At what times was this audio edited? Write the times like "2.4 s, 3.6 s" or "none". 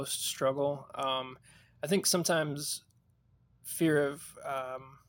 none